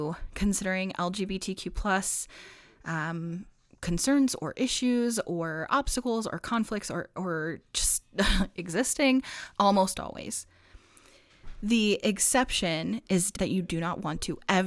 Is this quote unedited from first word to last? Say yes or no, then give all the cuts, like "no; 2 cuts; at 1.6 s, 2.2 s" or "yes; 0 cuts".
no; 2 cuts; at 9.5 s, 13.3 s